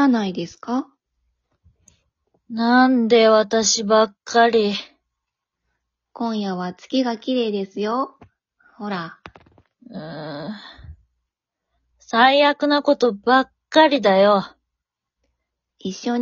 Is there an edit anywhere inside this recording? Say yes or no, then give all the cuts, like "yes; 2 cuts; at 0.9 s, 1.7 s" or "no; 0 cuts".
no; 0 cuts